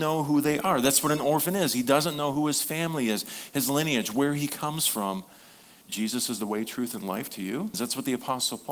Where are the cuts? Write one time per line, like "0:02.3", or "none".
0:05.8
0:07.7